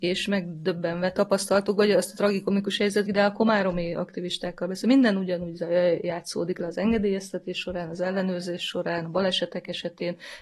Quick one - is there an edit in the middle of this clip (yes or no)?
yes